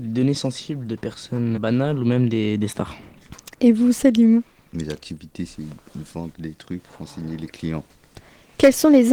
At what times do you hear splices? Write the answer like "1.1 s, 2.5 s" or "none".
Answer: 1.6 s